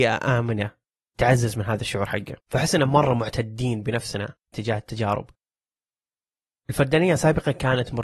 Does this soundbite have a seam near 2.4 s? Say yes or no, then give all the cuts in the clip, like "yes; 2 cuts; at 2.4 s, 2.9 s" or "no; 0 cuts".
yes; 1 cut; at 2.4 s